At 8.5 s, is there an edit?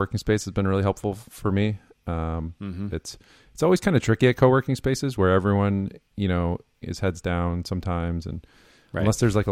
no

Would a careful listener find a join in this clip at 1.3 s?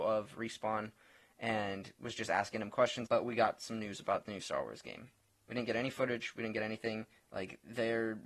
no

